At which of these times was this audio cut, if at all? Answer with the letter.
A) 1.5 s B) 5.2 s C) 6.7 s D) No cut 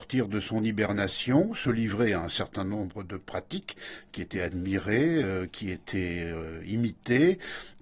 D